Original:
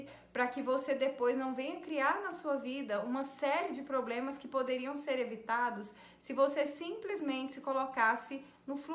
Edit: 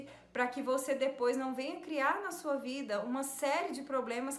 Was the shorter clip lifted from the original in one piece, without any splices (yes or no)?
yes